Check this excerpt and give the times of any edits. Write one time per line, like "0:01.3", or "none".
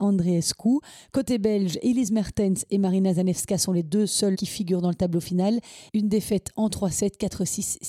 0:05.9